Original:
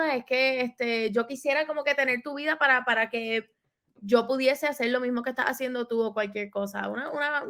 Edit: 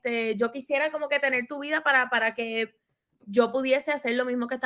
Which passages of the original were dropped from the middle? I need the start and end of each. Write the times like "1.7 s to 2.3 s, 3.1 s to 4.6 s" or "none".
none